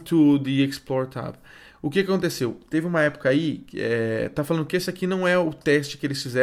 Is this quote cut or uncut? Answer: uncut